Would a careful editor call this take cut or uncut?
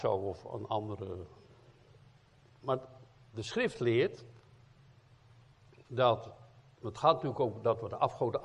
uncut